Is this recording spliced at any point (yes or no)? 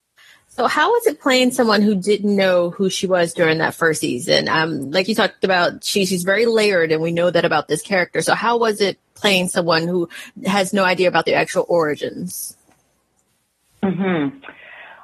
no